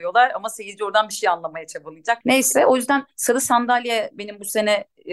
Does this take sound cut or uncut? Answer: cut